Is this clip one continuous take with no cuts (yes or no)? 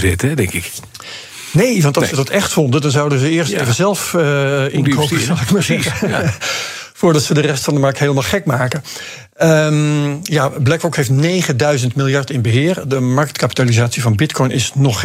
yes